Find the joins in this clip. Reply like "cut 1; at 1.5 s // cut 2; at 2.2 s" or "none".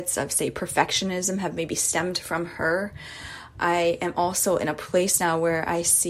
none